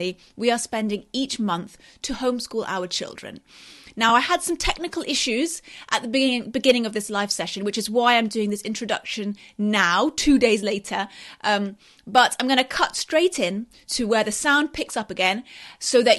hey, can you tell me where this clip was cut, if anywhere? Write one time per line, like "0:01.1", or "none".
none

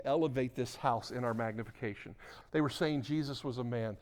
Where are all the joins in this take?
0:02.4

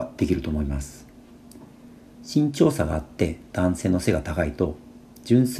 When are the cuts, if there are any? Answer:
0:02.1

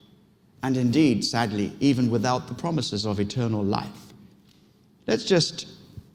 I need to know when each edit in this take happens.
0:04.9

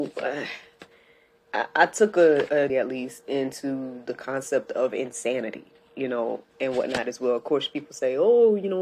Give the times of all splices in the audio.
0:02.7

